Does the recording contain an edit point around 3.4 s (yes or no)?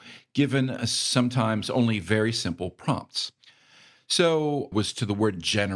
no